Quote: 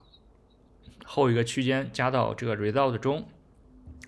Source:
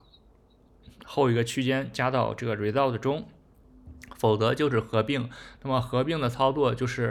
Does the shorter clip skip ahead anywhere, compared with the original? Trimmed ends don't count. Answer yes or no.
no